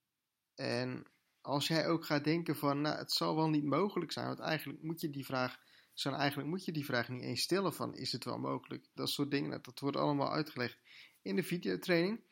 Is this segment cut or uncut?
cut